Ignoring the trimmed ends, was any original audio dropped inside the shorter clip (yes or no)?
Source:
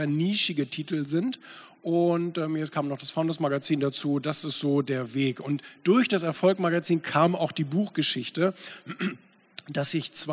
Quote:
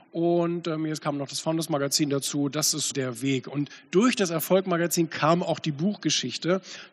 yes